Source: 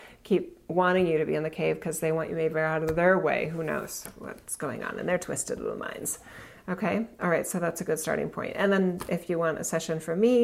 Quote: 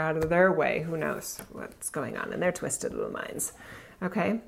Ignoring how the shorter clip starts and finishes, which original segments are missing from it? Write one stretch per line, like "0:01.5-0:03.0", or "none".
none